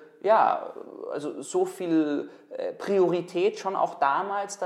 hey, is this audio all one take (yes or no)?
yes